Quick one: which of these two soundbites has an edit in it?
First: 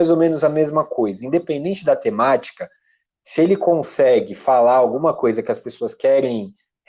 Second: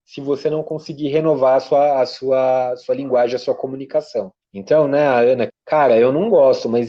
second; 2 cuts; at 4.4 s, 5.5 s

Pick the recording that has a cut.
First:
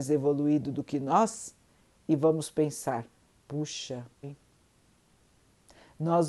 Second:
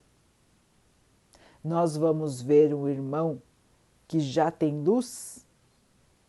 first; 1 cut; at 4.2 s

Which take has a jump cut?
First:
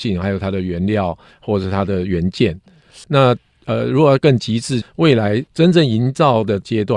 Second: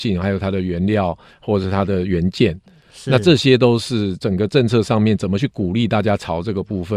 first; 2 cuts; at 3.0 s, 4.8 s

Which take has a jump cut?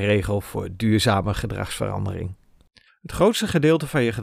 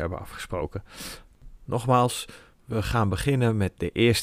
first; 1 cut; at 2.9 s

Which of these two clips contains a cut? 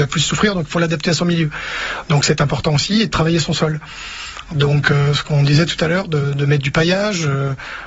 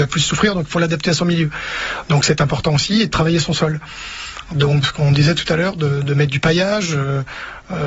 second; 1 cut; at 4.8 s

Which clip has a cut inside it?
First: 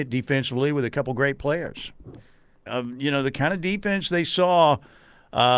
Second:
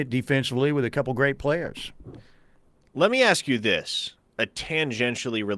first; 1 cut; at 2.7 s

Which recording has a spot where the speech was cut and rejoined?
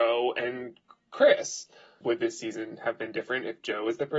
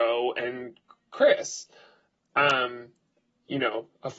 first; 1 cut; at 2.0 s

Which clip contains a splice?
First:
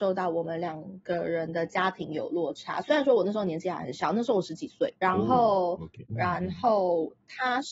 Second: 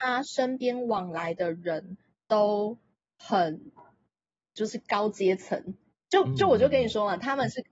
first; 2 cuts; at 5.0 s, 6.1 s

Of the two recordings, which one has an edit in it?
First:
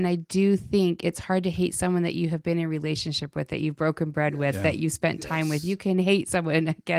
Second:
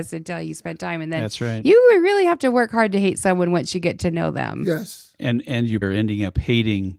second; 1 cut; at 5.8 s

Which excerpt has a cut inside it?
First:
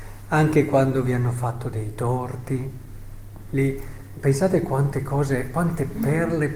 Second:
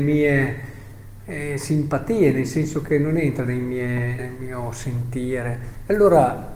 second; 1 cut; at 4.2 s

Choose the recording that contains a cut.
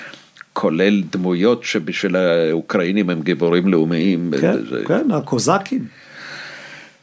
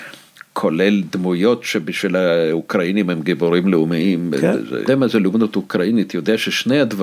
second; 1 cut; at 4.9 s

